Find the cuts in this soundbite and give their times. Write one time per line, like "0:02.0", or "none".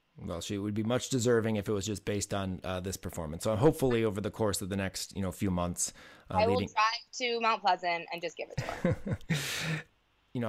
none